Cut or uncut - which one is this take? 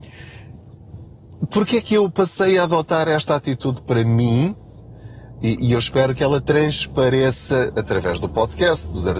uncut